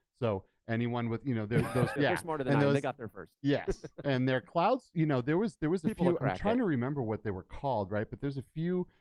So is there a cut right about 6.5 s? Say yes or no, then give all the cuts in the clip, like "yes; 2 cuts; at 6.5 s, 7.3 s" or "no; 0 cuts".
no; 1 cut; at 2.0 s